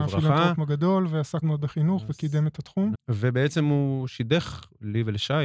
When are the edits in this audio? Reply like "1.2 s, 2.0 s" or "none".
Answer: 1.4 s, 2.9 s